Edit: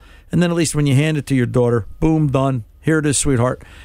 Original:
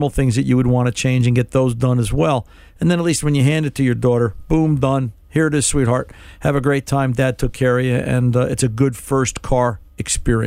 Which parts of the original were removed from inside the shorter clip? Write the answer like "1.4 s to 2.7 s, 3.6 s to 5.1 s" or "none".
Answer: none